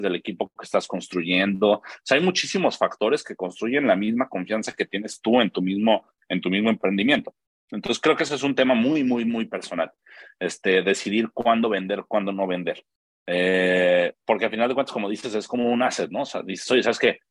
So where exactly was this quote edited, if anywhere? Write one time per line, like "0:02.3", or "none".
none